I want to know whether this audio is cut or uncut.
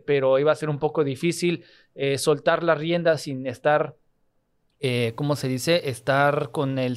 uncut